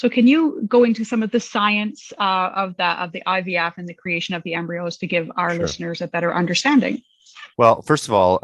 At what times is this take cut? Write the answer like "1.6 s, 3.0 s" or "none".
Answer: 7.5 s